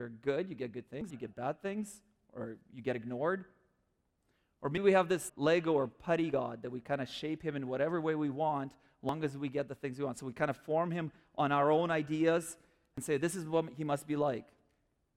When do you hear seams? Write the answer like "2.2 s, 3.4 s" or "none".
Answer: 1.1 s, 5.3 s